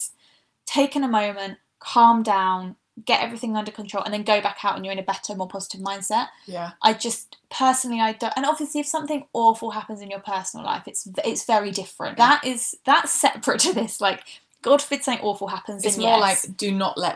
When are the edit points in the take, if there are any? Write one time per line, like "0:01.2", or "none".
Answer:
0:12.2